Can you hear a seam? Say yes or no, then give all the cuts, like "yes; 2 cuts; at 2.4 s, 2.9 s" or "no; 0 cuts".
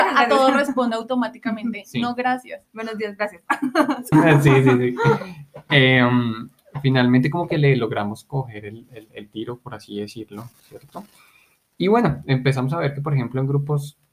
yes; 1 cut; at 4.1 s